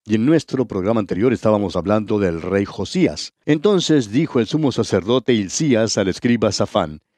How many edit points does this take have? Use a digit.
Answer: 1